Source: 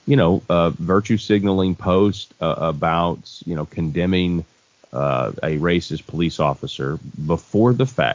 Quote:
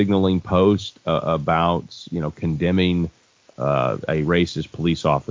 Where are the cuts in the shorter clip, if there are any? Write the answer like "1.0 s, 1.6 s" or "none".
none